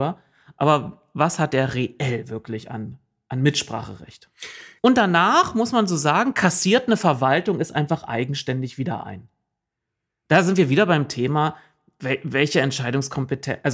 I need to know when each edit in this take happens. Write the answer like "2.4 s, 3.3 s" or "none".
4.8 s